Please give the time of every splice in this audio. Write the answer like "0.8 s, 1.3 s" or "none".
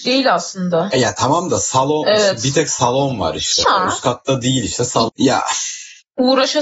3.6 s, 5.1 s